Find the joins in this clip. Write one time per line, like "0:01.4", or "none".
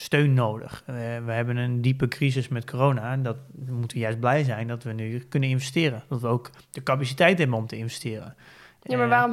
none

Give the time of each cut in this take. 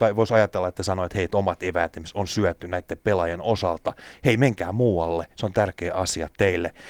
none

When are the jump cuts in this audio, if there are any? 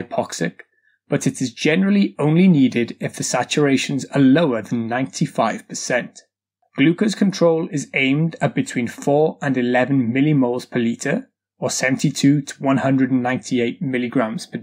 none

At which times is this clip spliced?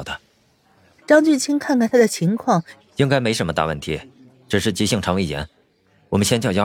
0:01.0
0:02.8

